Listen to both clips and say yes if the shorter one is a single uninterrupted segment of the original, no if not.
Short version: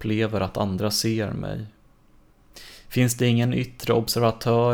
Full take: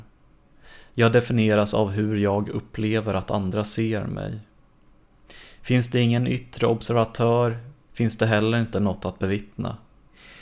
yes